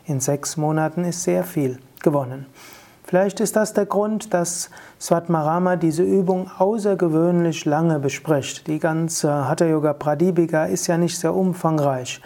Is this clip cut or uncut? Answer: uncut